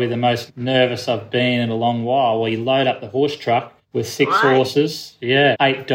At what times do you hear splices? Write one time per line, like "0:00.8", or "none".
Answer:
0:03.8